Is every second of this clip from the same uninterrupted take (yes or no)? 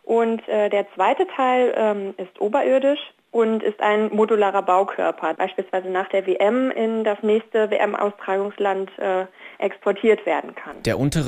no